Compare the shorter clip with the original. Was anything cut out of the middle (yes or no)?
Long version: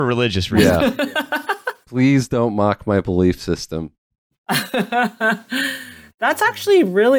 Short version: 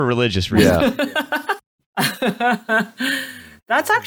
yes